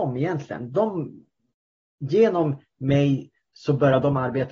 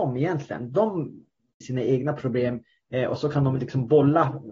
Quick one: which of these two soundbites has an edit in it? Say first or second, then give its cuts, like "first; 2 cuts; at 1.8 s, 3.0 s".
second; 1 cut; at 1.6 s